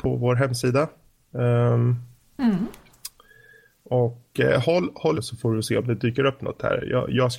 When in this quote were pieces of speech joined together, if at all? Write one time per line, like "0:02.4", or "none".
0:05.1